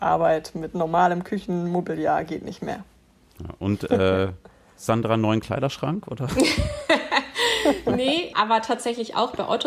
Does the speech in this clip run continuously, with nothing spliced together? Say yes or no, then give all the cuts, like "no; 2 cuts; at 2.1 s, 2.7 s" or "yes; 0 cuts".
no; 1 cut; at 8.3 s